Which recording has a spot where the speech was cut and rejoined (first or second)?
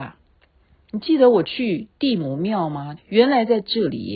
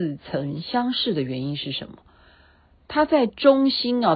first